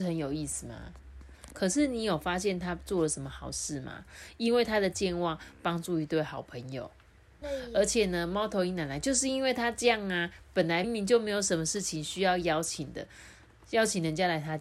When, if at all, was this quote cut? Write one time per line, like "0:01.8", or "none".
0:01.5
0:07.4
0:10.8

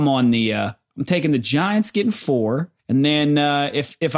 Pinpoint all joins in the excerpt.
0:02.8

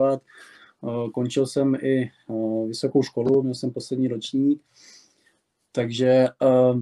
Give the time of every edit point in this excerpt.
none

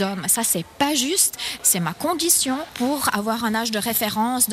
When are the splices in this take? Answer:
none

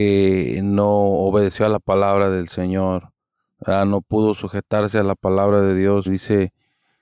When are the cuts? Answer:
0:06.1

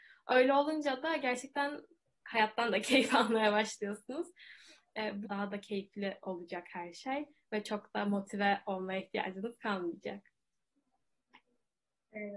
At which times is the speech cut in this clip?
0:05.2

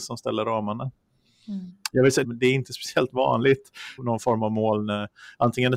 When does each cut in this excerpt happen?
0:02.2
0:04.0

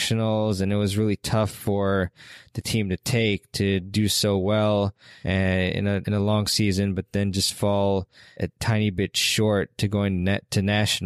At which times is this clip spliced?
none

